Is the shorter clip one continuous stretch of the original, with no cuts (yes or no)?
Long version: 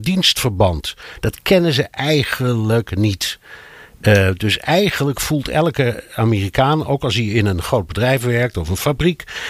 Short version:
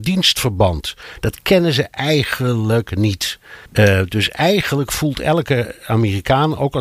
no